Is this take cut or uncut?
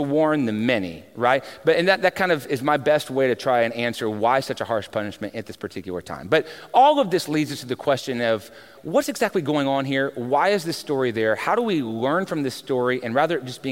cut